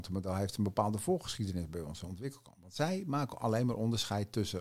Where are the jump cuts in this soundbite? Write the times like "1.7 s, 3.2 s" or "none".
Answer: none